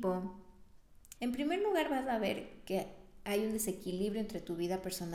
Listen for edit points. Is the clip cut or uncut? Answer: cut